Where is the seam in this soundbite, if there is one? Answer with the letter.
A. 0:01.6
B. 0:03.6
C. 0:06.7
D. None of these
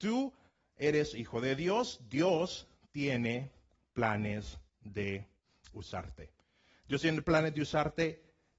D